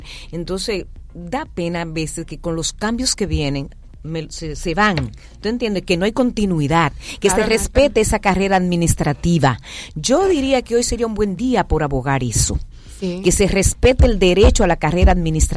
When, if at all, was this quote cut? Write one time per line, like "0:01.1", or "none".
none